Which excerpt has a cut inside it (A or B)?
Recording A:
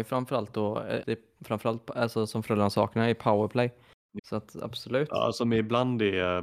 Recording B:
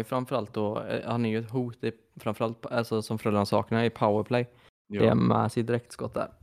A